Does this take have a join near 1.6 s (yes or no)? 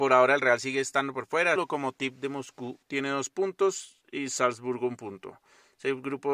yes